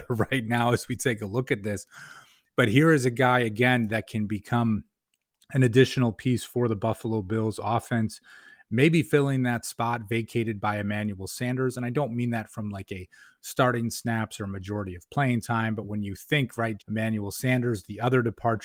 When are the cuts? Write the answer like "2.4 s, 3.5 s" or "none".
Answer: 16.8 s